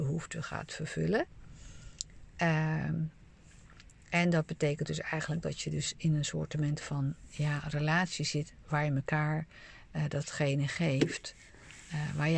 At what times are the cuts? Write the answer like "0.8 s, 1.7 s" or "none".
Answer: none